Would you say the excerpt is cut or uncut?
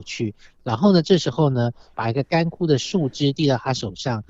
cut